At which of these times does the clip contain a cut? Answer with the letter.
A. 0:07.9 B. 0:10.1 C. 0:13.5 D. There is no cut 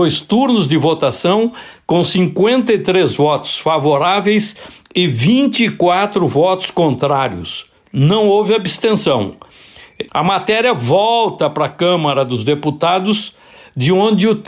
B